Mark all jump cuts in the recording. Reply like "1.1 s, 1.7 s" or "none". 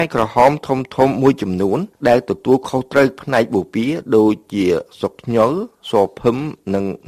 none